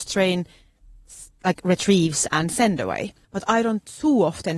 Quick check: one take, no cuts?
no; 1 cut; at 3.2 s

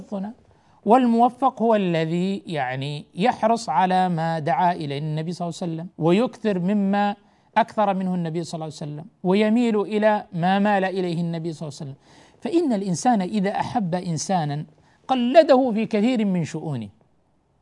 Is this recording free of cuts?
no; 1 cut; at 5.9 s

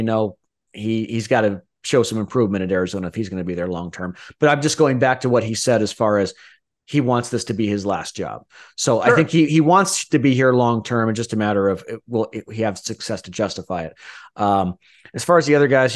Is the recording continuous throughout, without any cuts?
yes; 0 cuts

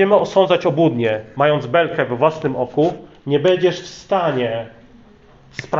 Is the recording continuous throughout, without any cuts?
yes; 0 cuts

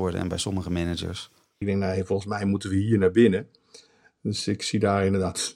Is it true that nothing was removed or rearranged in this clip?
no; 1 cut; at 1.6 s

